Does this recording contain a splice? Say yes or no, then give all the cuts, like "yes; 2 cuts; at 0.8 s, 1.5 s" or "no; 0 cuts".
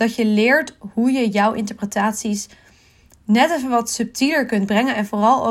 no; 0 cuts